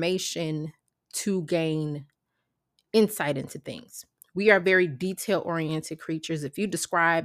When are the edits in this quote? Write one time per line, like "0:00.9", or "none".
none